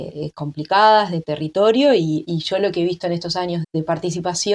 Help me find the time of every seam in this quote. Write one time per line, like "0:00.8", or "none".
0:02.2
0:03.6